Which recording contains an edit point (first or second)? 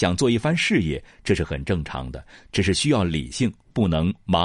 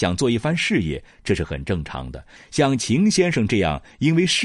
second